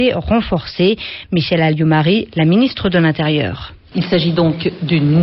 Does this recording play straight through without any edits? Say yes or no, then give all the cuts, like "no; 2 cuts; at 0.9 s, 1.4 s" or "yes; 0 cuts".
no; 1 cut; at 3.9 s